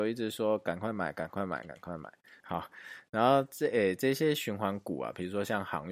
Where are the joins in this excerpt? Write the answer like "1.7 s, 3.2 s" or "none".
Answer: 2.4 s